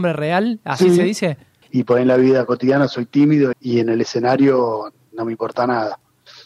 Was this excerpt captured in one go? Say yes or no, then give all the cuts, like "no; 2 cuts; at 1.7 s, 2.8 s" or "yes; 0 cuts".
no; 2 cuts; at 1.6 s, 3.5 s